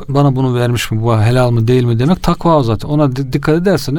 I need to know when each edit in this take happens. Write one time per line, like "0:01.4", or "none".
none